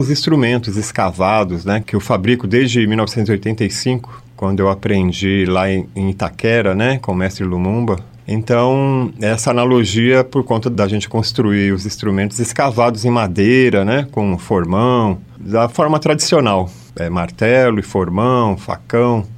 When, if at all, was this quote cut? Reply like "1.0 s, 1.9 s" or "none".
none